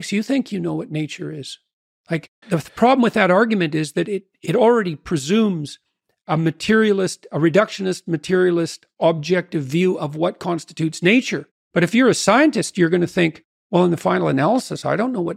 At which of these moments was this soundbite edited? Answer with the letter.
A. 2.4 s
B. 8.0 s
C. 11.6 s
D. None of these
A